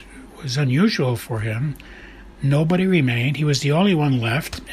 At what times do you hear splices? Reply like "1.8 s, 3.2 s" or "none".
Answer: none